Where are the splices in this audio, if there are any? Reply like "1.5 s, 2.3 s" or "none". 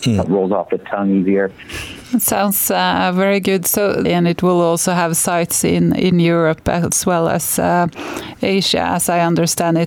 2.0 s, 4.1 s